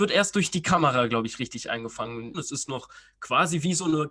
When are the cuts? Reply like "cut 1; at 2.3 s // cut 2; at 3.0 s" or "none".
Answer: cut 1; at 2.3 s